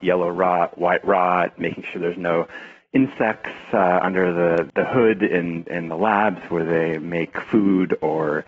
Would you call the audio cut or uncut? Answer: uncut